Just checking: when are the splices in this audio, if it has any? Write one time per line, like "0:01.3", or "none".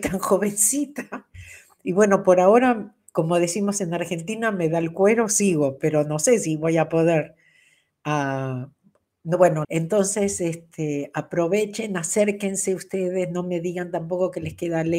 0:09.6